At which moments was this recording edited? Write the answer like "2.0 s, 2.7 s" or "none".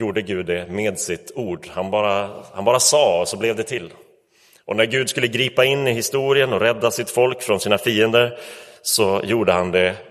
none

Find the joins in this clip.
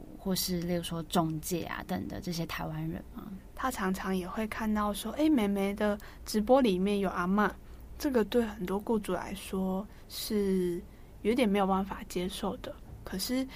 1.9 s, 3.5 s

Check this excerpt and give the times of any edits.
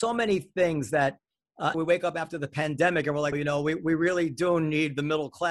1.7 s, 3.3 s

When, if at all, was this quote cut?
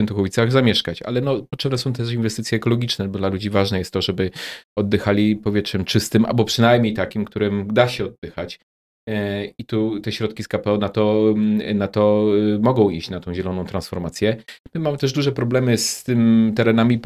none

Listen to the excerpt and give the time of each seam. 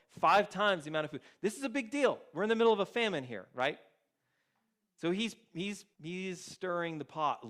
5.9 s

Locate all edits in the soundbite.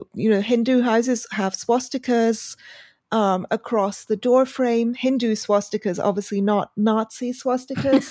none

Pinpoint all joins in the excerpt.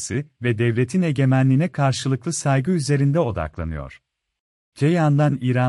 4.7 s

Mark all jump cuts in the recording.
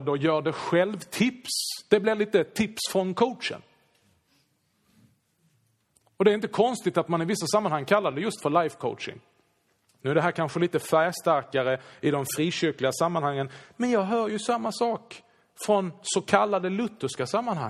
none

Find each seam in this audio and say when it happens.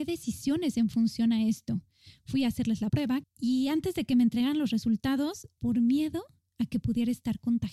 3.2 s, 5.6 s

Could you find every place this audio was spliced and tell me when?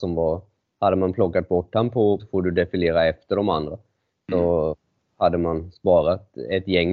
2.2 s

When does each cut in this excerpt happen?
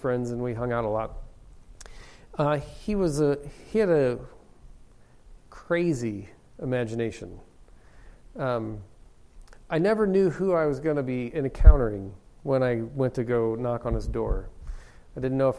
none

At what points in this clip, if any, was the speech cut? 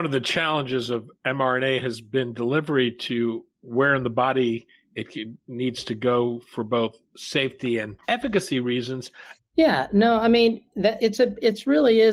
8.0 s, 9.4 s, 11.0 s

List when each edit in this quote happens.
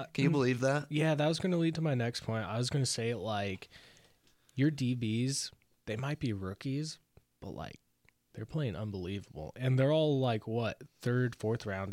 none

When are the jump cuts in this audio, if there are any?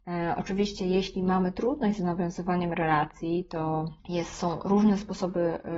4.0 s

